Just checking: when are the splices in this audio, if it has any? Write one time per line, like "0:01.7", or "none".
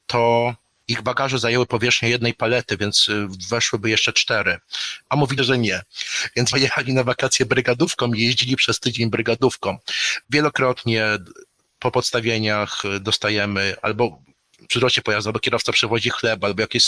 0:05.4
0:10.2